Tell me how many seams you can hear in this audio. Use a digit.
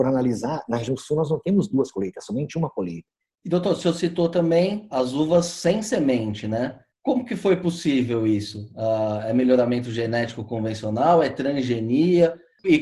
1